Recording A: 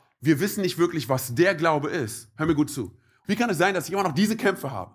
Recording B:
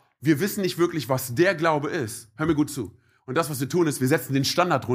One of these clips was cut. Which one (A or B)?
A